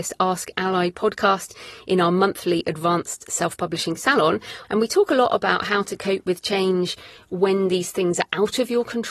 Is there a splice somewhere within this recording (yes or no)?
yes